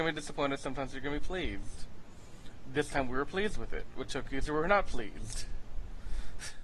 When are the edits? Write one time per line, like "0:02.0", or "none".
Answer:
none